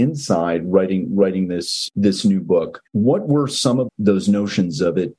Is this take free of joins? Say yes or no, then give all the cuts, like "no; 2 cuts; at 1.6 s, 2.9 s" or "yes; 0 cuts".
no; 2 cuts; at 2.9 s, 3.9 s